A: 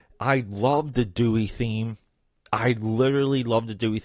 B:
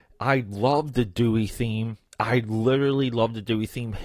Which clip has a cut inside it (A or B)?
B